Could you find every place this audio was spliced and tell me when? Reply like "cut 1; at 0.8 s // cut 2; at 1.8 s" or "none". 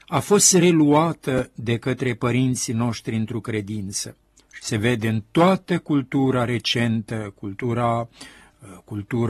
cut 1; at 4.4 s